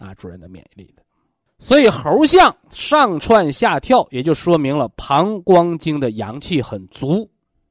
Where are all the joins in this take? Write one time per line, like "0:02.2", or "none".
none

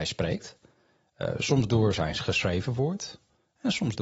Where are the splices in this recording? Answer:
none

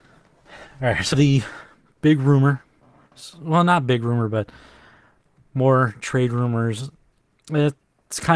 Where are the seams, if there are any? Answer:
0:01.1

